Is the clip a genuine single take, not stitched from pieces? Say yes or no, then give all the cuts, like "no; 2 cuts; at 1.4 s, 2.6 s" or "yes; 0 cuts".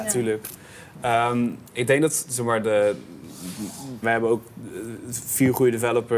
no; 1 cut; at 4.0 s